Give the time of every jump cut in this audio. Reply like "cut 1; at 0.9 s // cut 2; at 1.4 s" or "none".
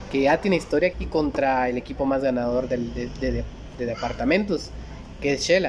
cut 1; at 0.9 s